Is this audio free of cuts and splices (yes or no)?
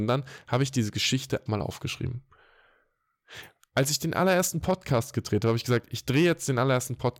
no